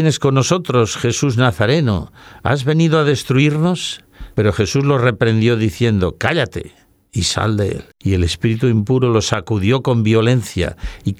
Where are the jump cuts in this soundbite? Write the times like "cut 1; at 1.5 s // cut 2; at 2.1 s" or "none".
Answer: cut 1; at 4.3 s // cut 2; at 7.9 s